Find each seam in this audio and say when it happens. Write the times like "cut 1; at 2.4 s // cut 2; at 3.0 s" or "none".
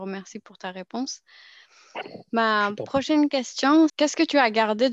cut 1; at 3.9 s